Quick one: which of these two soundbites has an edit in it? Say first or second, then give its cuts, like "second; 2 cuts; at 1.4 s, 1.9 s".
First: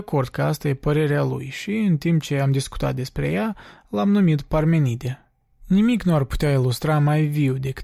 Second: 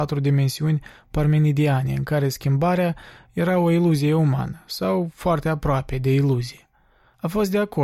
first; 1 cut; at 5.5 s